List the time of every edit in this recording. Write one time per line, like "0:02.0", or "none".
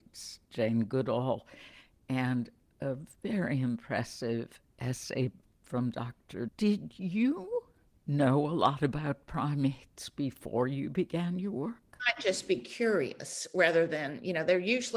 0:06.5
0:12.0